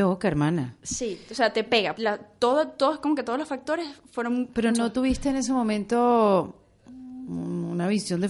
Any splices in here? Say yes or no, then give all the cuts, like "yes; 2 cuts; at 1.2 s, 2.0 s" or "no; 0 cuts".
yes; 2 cuts; at 1.9 s, 4.7 s